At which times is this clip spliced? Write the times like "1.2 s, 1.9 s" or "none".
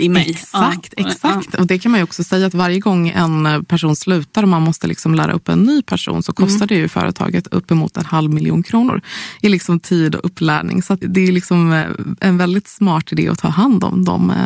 11.0 s